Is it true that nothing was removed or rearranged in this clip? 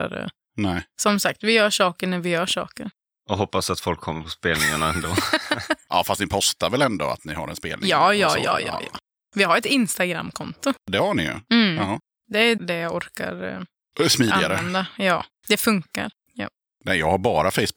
no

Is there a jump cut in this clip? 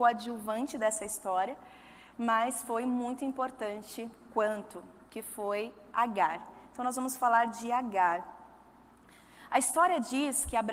no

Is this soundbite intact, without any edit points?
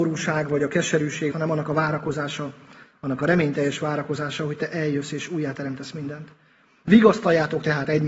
no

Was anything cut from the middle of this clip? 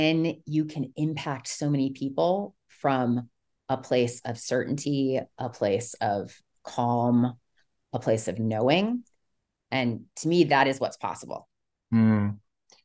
no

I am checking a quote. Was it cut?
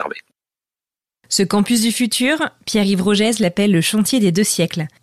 no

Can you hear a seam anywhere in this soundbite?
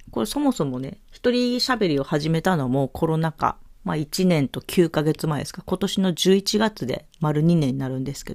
yes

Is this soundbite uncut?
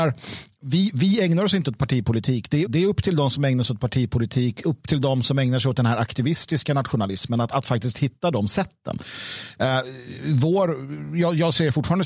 no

